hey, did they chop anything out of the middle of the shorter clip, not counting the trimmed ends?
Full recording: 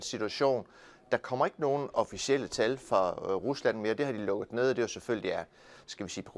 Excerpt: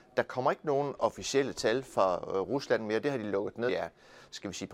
yes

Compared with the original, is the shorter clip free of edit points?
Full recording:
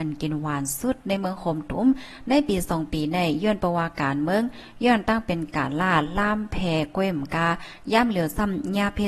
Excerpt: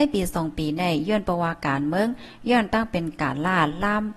yes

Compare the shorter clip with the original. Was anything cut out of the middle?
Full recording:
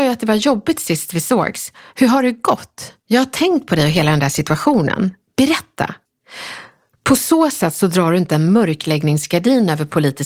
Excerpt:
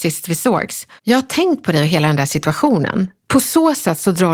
yes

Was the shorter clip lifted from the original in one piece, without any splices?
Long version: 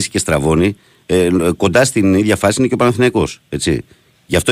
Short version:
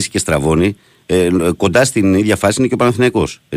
yes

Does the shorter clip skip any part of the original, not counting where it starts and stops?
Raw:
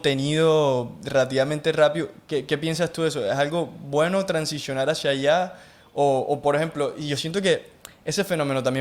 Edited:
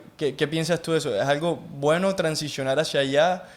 no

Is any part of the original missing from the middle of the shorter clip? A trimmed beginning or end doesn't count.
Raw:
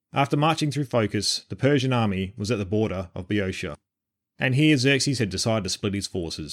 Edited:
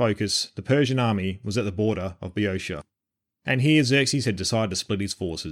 no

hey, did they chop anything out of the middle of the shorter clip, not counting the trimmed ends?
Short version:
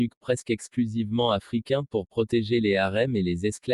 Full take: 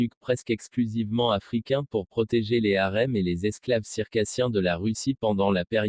no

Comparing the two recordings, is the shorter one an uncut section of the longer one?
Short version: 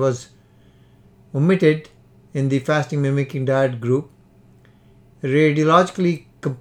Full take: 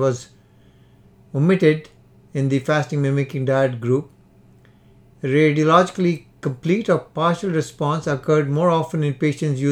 yes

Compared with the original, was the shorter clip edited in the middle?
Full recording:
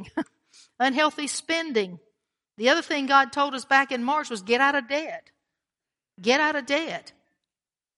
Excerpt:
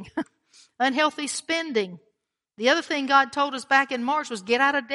no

